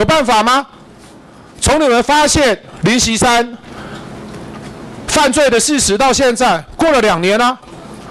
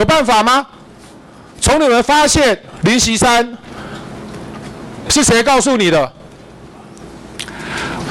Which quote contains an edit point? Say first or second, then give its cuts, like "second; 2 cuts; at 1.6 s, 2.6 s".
second; 1 cut; at 5.1 s